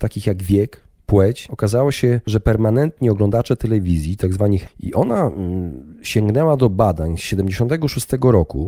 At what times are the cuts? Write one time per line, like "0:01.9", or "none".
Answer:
0:01.5
0:04.7